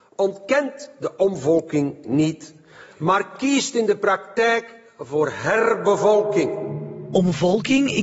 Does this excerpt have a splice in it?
no; 0 cuts

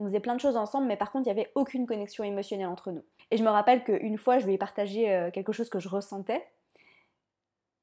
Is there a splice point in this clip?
yes; 1 cut; at 3.2 s

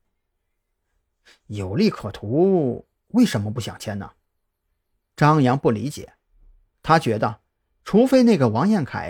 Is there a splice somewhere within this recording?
no; 0 cuts

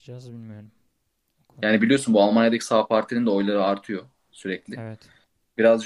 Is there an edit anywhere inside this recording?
no; 0 cuts

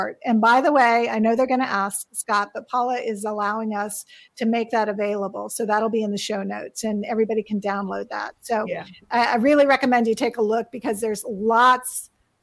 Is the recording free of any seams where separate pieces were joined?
yes; 0 cuts

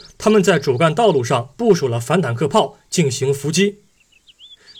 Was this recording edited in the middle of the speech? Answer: no; 0 cuts

